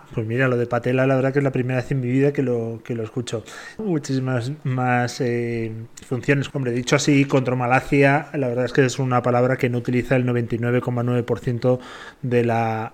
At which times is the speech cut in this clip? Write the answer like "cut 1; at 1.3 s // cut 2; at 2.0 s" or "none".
cut 1; at 3.8 s // cut 2; at 6.5 s